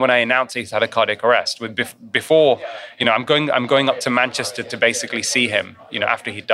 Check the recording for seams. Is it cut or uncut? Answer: uncut